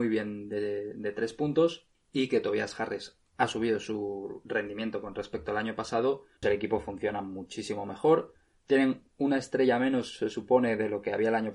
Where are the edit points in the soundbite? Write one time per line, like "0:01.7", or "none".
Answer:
0:06.4